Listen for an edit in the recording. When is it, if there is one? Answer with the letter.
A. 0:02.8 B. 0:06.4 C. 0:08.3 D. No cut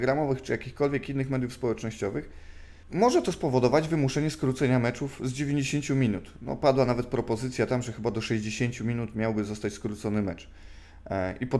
A